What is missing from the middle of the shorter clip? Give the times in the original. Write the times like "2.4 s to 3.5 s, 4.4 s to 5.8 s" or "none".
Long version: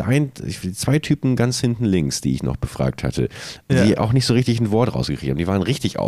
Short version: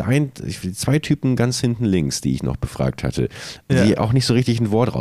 none